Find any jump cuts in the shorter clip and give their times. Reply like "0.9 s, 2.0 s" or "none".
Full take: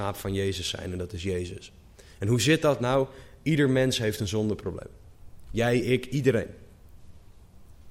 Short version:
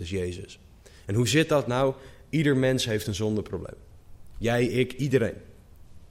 none